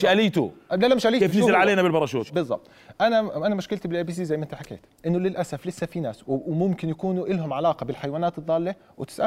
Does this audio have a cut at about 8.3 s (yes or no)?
no